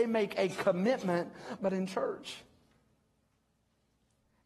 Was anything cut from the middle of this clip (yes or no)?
yes